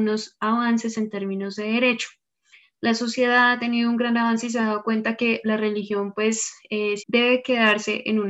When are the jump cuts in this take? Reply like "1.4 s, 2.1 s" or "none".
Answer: 7.0 s